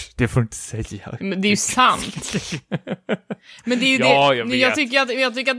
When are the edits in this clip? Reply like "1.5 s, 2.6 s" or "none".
none

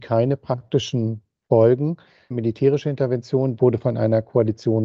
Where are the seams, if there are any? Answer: 2.3 s, 3.6 s

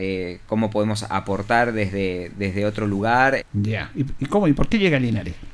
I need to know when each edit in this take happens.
3.4 s

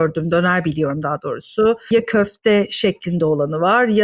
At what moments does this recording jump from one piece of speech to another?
none

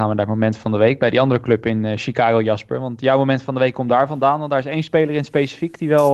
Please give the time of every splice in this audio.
none

